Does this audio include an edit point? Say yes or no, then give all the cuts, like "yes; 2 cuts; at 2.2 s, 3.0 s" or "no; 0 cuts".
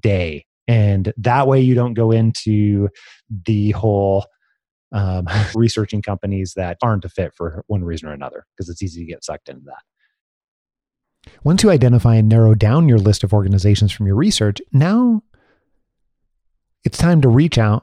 yes; 2 cuts; at 5.5 s, 6.8 s